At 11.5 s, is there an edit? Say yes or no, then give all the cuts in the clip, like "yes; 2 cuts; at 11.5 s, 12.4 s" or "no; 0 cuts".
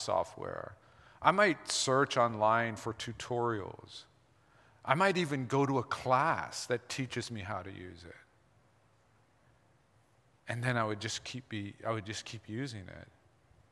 no; 0 cuts